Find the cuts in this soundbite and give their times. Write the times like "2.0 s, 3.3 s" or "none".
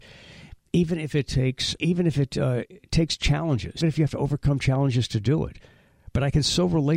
1.8 s, 3.8 s